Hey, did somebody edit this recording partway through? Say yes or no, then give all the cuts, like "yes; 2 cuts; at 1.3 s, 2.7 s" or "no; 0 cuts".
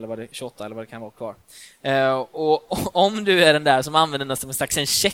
yes; 1 cut; at 2.7 s